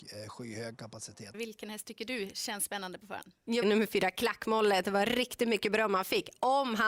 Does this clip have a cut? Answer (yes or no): yes